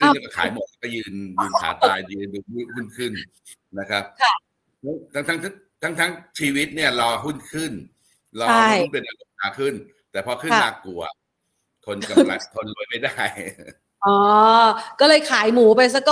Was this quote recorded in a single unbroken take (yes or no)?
yes